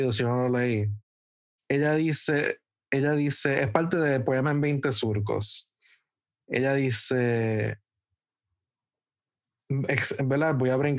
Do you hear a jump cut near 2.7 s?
no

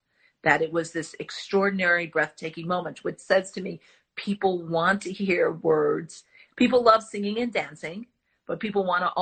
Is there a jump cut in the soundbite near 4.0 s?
no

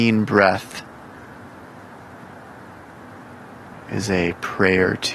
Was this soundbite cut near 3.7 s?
yes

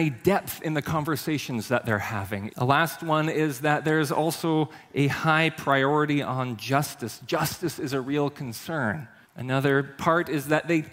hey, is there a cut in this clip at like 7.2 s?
no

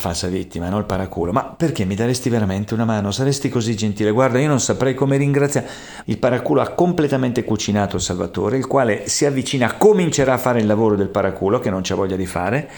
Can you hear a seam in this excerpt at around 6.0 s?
yes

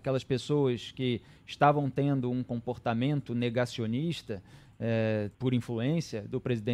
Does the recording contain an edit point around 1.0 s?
no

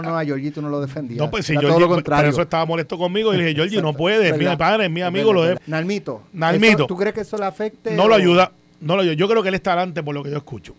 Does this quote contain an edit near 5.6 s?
yes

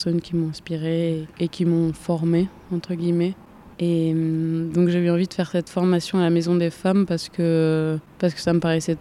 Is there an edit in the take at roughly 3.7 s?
yes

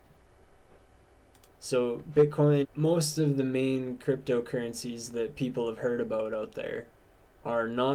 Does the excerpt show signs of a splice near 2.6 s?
yes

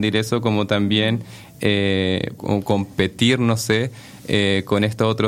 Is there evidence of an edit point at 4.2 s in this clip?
no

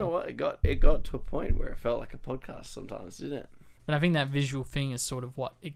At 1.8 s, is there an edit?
no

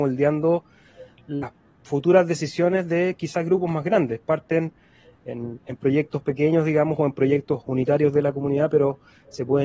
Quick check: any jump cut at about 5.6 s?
no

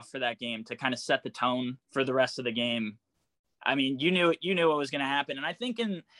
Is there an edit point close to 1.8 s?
yes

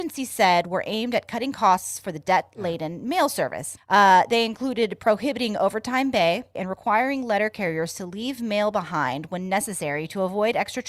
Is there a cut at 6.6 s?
yes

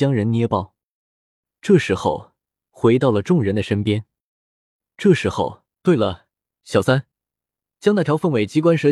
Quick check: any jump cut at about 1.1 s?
no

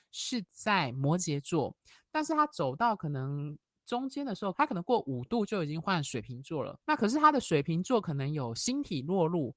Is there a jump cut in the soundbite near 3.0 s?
no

